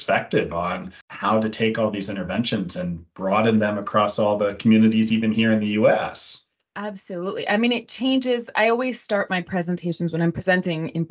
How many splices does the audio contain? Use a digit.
1